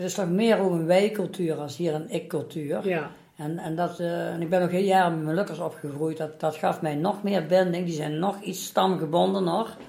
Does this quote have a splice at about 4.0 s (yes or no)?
no